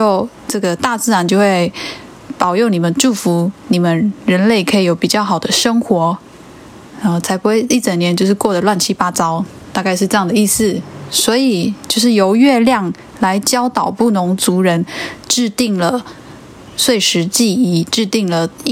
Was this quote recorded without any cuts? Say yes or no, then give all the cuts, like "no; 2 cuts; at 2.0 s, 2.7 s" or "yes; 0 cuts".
yes; 0 cuts